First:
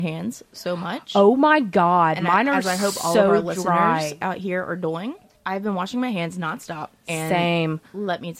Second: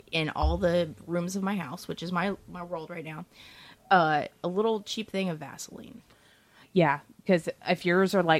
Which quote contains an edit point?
first; 1 cut; at 5.3 s

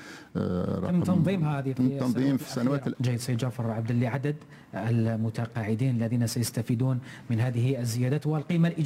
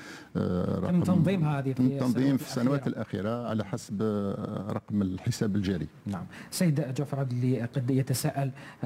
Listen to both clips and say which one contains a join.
first; 1 cut; at 2.9 s

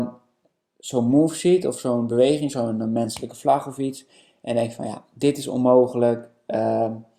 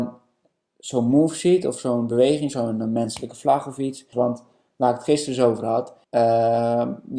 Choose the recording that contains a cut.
second; 2 cuts; at 4.1 s, 6.0 s

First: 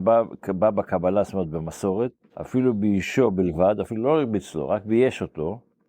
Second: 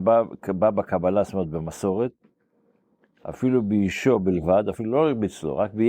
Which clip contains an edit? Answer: first; 1 cut; at 2.3 s

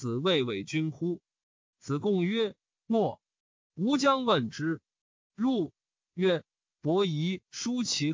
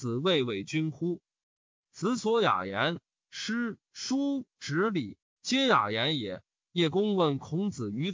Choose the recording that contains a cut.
second; 1 cut; at 1.6 s

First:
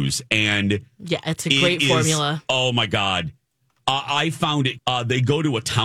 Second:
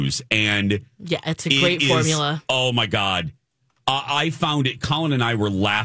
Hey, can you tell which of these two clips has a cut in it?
first; 1 cut; at 4.8 s

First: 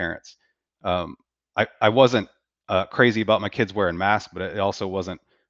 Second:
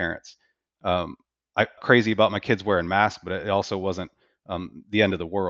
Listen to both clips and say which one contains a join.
second; 1 cut; at 1.8 s

